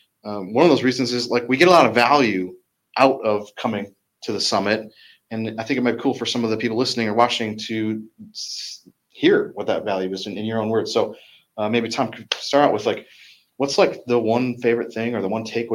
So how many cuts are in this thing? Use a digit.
0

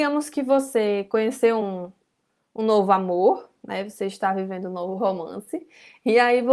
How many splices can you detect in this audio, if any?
0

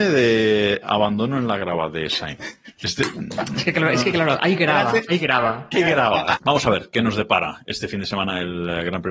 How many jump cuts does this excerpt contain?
1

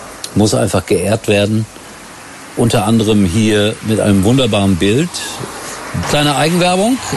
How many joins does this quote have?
1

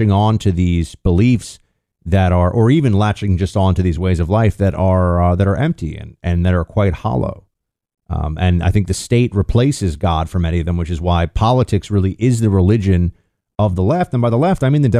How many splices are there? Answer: 0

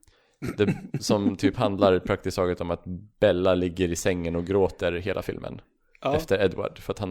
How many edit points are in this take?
1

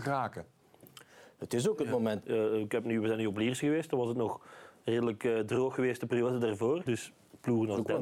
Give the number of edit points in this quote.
2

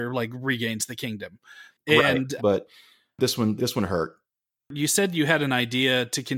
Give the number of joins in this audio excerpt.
2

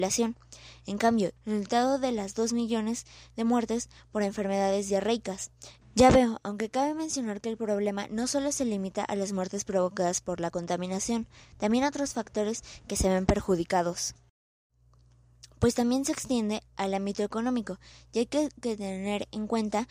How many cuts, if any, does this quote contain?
2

